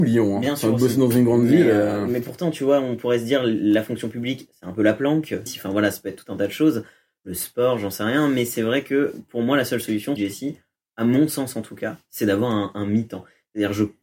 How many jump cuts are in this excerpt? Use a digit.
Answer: 2